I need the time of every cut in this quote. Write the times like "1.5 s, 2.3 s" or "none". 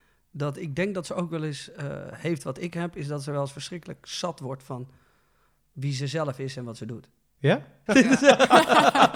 7.9 s